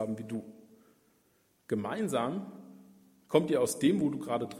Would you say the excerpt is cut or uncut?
uncut